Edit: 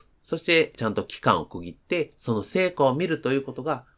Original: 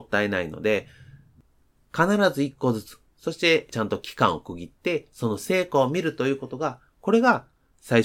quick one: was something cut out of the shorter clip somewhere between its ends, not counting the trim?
no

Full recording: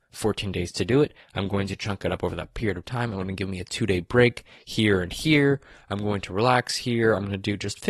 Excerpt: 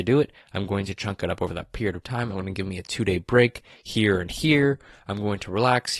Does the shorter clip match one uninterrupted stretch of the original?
yes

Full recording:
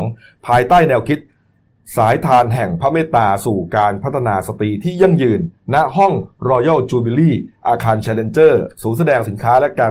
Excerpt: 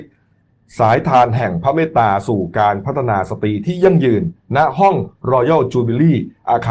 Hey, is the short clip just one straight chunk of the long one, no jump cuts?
yes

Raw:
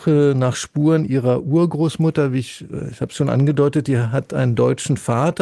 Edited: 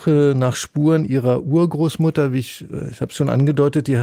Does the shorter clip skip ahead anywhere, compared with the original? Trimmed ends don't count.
no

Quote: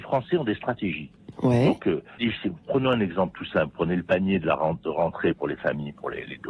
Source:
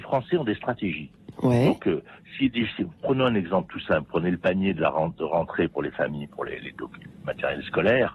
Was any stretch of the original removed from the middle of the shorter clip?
yes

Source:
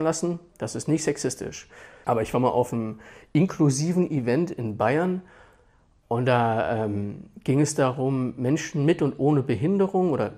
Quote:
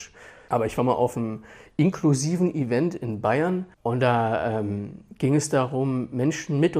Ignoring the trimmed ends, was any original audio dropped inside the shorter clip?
yes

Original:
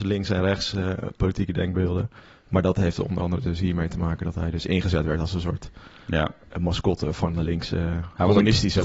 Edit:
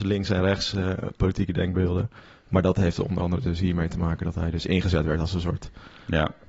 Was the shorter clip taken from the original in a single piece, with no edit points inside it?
yes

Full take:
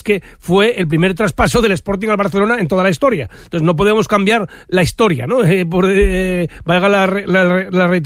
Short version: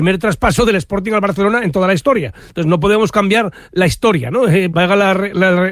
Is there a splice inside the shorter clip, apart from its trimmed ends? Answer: yes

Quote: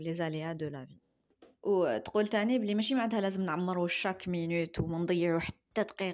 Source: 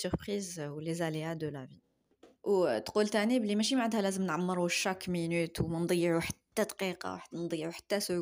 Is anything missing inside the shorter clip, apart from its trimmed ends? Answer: no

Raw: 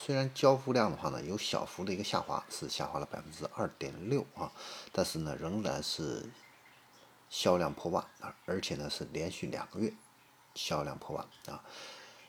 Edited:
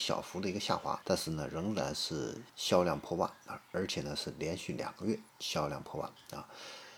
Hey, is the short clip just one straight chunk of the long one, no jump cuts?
no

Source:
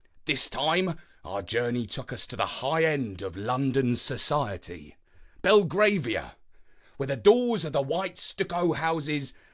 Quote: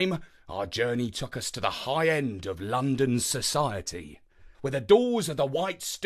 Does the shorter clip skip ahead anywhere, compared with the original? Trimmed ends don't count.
yes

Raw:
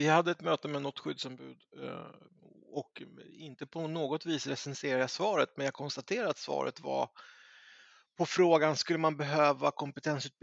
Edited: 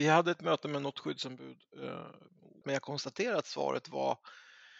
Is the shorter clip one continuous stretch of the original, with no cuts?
no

